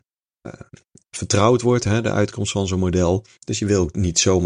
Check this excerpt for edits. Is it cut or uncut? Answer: cut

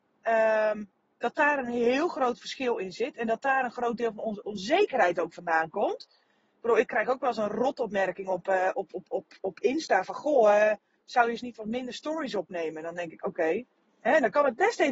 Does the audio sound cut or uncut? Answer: uncut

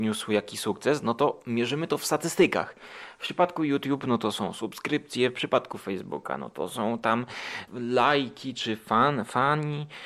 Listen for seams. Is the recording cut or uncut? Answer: uncut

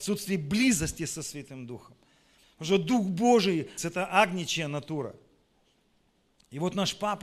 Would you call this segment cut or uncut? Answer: cut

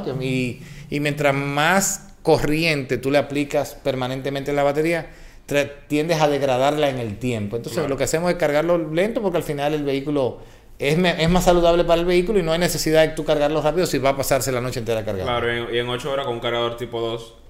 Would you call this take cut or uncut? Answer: uncut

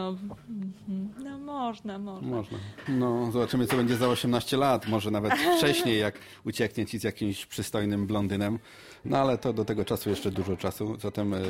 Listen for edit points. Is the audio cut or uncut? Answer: cut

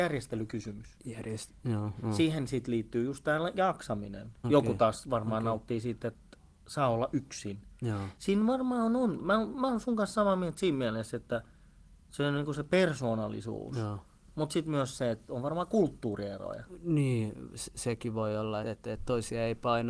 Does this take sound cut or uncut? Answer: cut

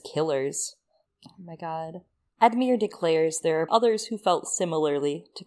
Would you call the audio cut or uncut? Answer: cut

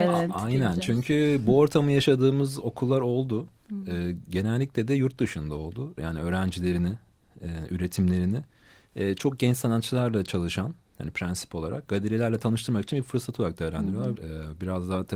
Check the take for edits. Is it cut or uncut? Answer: cut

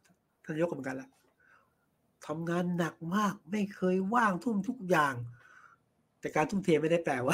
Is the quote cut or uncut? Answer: cut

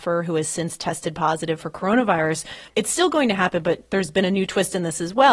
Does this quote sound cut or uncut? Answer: cut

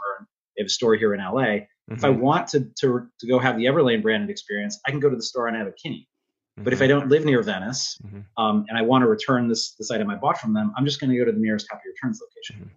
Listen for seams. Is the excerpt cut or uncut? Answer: cut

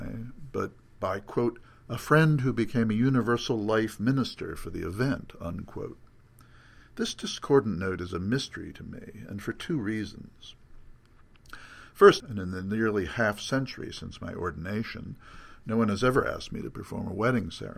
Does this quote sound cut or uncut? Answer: cut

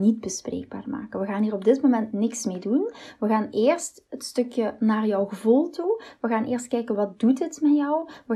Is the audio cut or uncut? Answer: uncut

